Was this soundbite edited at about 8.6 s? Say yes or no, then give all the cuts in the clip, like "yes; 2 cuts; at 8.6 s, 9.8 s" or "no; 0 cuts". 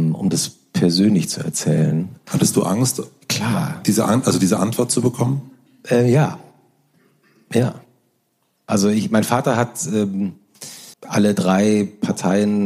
no; 1 cut; at 10.9 s